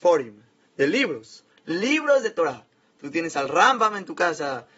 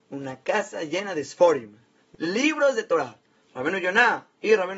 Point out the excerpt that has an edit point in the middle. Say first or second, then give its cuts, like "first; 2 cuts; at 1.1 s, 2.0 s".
second; 2 cuts; at 2.1 s, 3.4 s